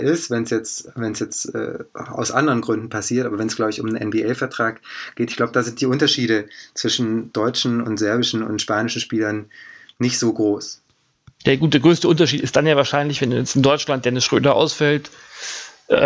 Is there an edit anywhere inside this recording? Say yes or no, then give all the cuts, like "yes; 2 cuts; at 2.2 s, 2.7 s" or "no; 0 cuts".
no; 0 cuts